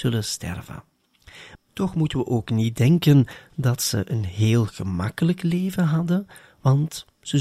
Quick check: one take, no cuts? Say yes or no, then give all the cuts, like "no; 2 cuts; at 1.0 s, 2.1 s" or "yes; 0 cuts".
no; 1 cut; at 1.6 s